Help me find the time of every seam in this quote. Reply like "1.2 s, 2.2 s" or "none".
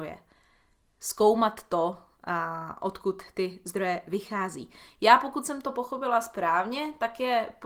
none